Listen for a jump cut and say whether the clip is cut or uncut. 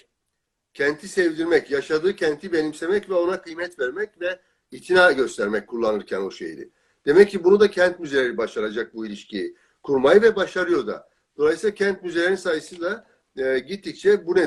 uncut